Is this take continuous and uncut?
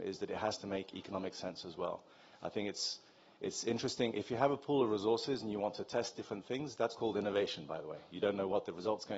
yes; 0 cuts

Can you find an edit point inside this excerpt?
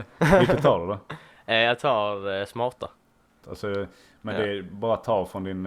yes; 1 cut; at 3.4 s

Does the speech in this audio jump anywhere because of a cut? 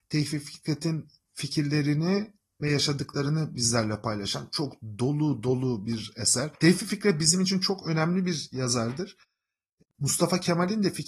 yes; 1 cut; at 9.8 s

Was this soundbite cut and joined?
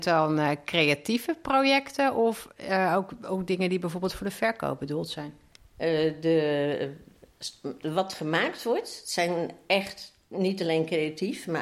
no; 0 cuts

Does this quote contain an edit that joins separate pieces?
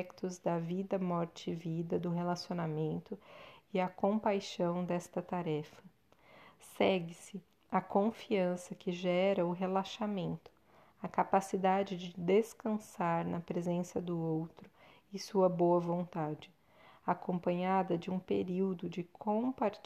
no; 0 cuts

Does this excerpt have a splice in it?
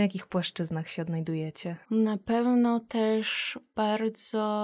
yes; 1 cut; at 1.8 s

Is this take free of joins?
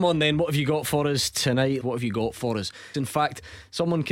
no; 2 cuts; at 1.8 s, 2.9 s

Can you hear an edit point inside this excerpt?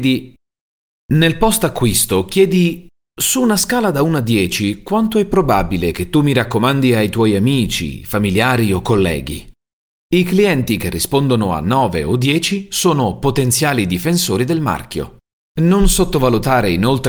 no; 0 cuts

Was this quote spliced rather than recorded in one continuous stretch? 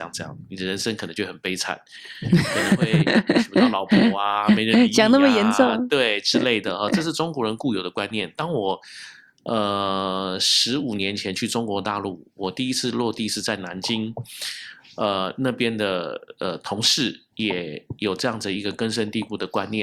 yes; 1 cut; at 17.3 s

